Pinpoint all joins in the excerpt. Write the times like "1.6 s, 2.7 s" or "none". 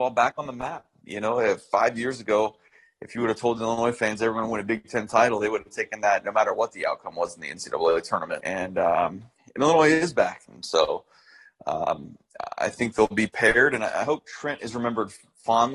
8.4 s, 10.5 s